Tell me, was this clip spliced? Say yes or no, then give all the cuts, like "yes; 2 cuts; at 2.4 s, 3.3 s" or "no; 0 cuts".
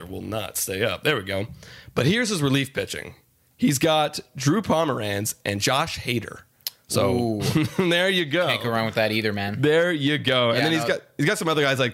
no; 0 cuts